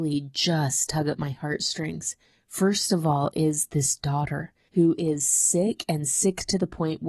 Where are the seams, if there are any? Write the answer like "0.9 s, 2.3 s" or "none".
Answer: none